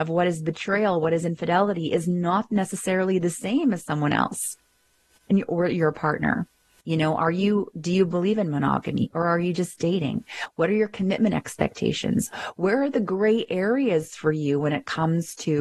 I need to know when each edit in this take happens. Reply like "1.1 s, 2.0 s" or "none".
6.8 s